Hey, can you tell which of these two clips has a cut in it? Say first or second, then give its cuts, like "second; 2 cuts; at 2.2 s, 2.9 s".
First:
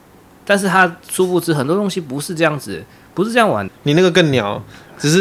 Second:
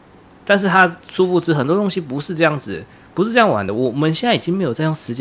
first; 1 cut; at 3.7 s